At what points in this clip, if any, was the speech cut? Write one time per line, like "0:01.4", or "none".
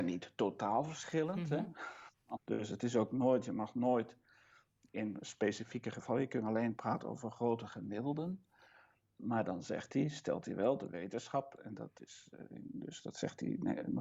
0:02.4